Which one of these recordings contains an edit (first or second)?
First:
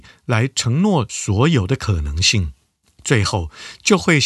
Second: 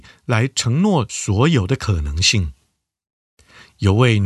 first